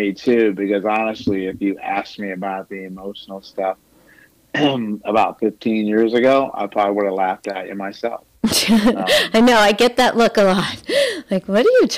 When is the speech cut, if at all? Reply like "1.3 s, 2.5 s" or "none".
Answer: none